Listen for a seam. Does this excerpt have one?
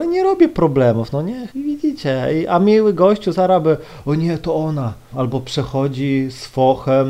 yes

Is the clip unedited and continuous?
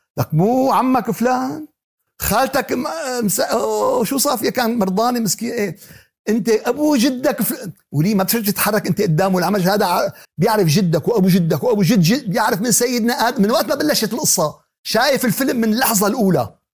no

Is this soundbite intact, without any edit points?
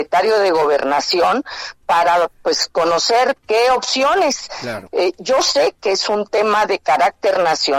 no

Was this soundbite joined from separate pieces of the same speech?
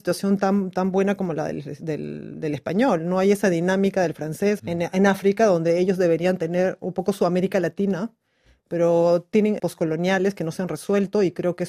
yes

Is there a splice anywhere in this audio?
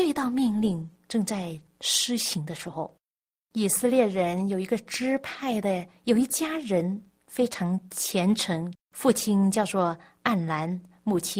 yes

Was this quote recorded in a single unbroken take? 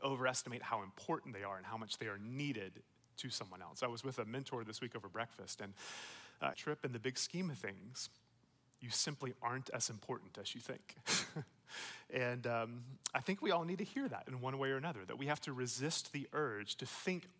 no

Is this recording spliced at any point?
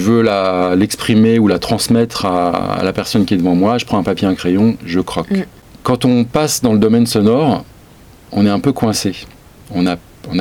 no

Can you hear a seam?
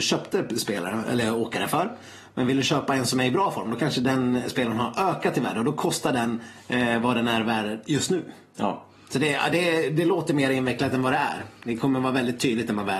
no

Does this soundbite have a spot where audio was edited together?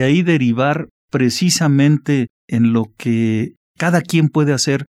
no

